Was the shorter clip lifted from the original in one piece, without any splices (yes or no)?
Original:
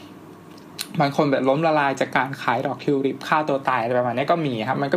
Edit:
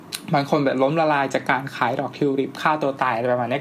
yes